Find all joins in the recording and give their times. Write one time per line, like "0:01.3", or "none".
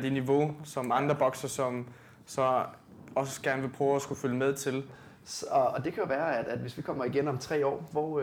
0:04.9

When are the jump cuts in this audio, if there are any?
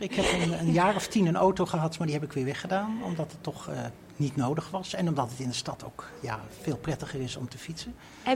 none

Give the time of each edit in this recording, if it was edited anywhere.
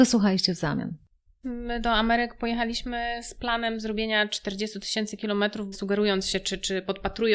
0:01.4
0:05.7

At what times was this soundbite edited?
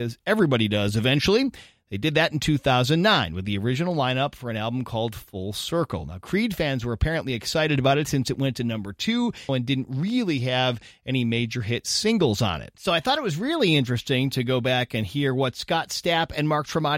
0:09.5
0:12.8

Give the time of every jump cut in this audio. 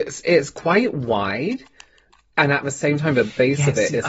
none

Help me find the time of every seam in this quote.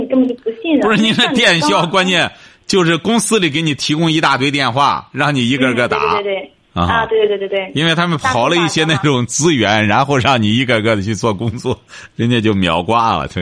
none

